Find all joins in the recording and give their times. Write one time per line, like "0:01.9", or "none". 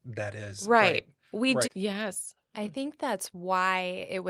0:01.6